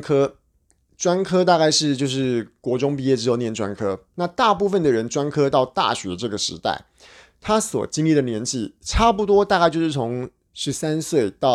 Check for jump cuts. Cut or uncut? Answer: uncut